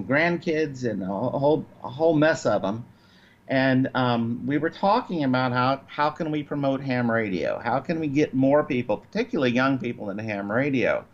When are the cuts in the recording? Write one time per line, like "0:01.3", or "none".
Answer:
none